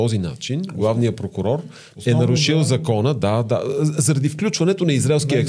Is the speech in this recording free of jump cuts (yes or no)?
yes